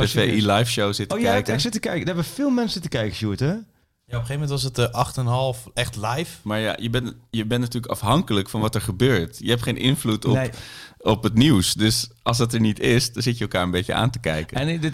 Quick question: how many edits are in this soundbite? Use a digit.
1